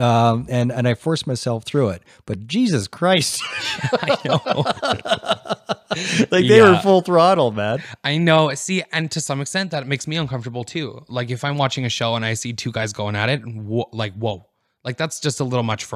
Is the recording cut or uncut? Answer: uncut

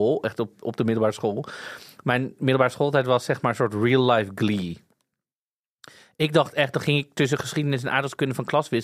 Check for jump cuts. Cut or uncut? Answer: uncut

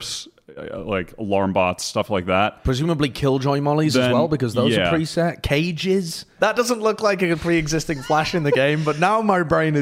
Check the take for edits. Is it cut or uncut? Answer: cut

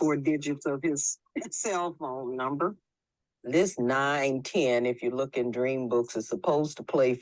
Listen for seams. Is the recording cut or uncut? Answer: cut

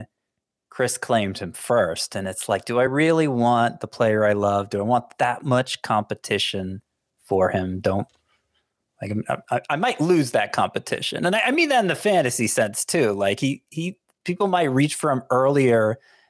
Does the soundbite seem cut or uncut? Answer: uncut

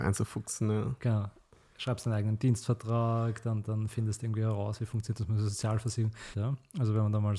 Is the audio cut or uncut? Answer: cut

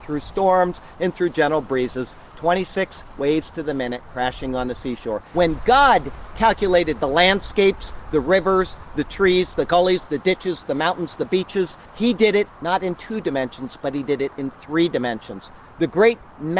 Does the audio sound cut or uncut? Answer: cut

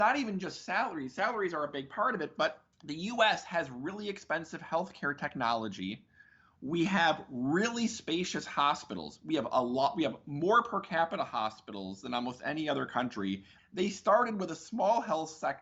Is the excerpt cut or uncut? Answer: cut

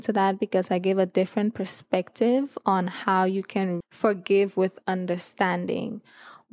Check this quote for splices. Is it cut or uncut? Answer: cut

